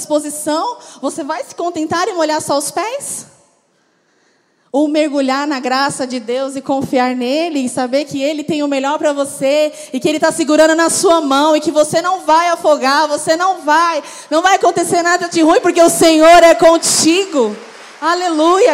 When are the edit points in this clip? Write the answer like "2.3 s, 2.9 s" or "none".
none